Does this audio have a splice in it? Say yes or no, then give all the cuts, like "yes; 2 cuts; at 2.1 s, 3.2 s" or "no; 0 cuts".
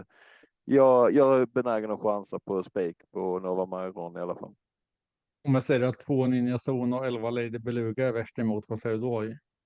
no; 0 cuts